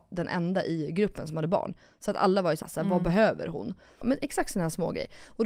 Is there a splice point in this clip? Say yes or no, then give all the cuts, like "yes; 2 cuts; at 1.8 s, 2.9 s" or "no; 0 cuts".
yes; 2 cuts; at 2.6 s, 4.0 s